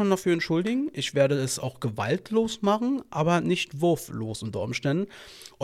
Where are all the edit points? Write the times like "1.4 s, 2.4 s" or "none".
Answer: none